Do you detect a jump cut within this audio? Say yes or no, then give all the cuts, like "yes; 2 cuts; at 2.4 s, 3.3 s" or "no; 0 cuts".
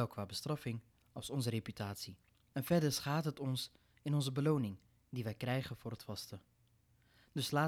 no; 0 cuts